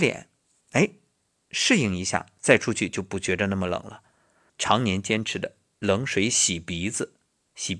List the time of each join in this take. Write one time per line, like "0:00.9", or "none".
0:04.5